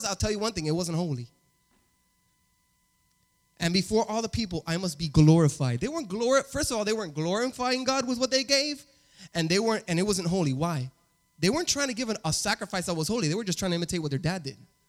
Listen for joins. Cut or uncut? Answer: uncut